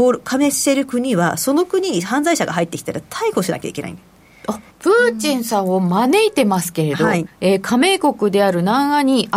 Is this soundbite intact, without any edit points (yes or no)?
no